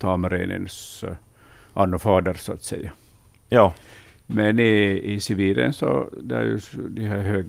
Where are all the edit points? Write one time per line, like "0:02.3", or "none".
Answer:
none